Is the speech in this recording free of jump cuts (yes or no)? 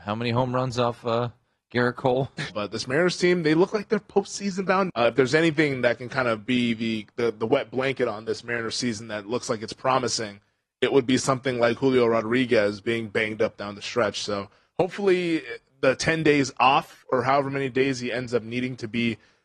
no